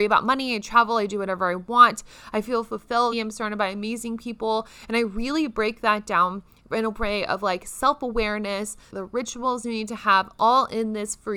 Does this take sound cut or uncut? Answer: cut